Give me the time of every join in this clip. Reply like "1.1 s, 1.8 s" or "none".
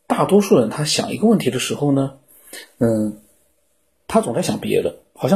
none